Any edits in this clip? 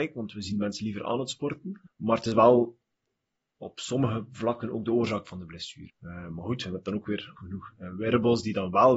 yes; 3 cuts; at 1.8 s, 5.9 s, 7.4 s

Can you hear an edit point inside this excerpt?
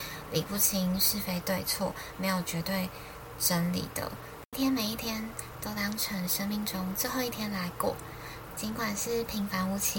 yes; 2 cuts; at 4.5 s, 8.5 s

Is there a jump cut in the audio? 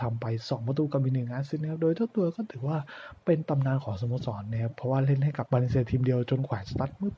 yes; 1 cut; at 5.5 s

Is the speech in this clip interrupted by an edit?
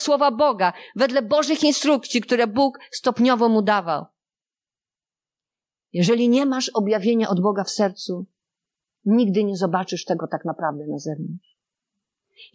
no; 0 cuts

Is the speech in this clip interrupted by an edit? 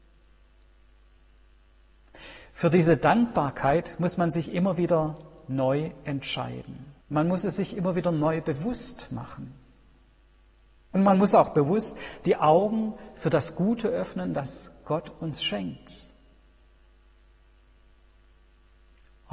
yes; 1 cut; at 7.0 s

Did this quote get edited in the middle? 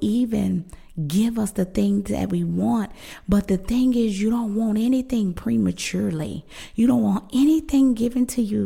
no; 0 cuts

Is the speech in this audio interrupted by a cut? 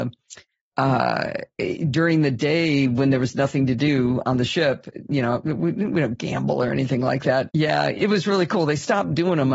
yes; 1 cut; at 7.5 s

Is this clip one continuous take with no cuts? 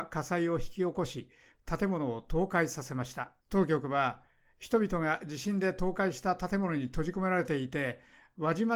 no; 1 cut; at 3.4 s

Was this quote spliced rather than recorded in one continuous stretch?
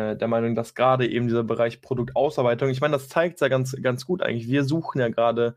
no; 0 cuts

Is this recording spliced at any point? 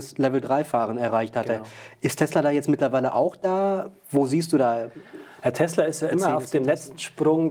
no; 0 cuts

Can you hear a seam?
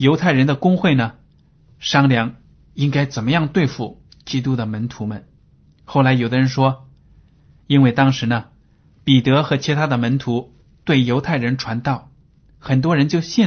yes; 1 cut; at 7.6 s

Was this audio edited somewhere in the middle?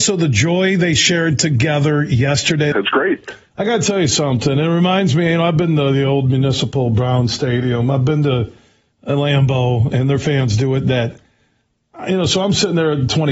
yes; 1 cut; at 2.7 s

